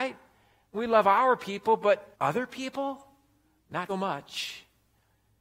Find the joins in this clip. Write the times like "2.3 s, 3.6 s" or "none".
2.1 s, 3.9 s